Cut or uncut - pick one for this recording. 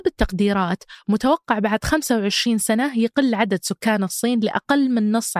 uncut